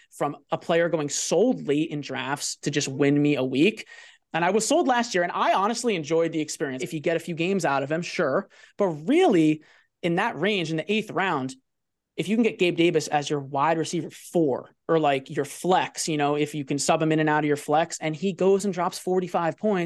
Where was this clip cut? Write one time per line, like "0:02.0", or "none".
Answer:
0:04.2
0:06.8